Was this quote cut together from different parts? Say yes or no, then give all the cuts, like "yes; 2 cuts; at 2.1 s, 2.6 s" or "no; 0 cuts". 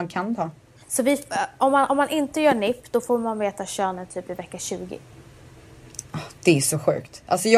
no; 0 cuts